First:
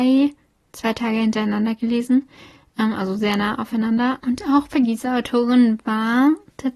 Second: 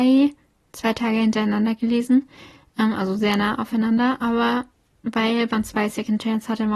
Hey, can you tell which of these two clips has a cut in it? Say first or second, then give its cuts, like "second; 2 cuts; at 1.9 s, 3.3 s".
first; 1 cut; at 4.2 s